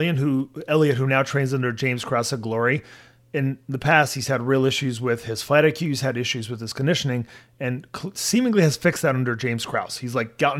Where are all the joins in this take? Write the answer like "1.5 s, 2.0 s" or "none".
none

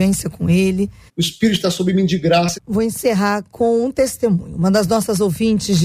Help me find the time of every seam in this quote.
1.1 s, 2.5 s

